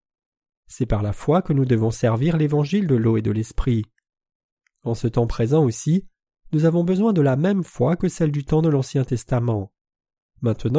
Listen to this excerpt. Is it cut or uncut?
uncut